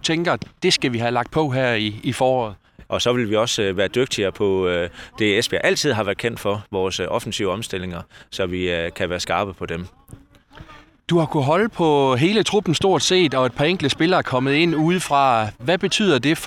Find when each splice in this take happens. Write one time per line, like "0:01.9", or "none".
0:02.9